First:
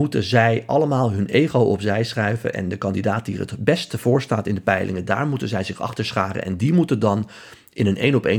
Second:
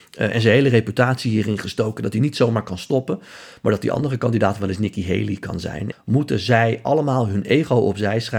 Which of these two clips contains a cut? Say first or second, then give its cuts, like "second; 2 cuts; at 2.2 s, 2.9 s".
second; 1 cut; at 5.9 s